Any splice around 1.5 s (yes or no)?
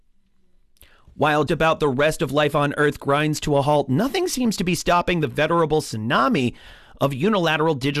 yes